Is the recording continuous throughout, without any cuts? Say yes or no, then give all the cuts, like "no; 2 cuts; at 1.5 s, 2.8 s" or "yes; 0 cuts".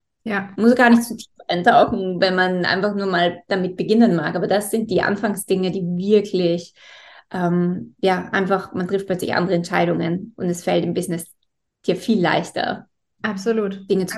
yes; 0 cuts